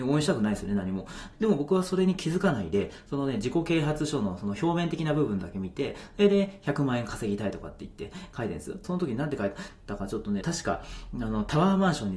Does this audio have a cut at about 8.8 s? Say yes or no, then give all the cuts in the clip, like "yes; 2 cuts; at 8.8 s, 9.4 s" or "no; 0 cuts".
yes; 3 cuts; at 1.3 s, 8.8 s, 10.4 s